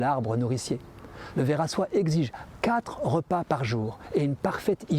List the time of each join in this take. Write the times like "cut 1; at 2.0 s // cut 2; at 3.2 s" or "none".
cut 1; at 1.3 s